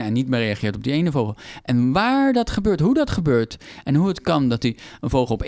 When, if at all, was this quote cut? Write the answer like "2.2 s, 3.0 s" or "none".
none